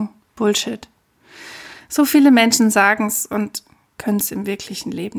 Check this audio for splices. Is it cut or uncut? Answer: uncut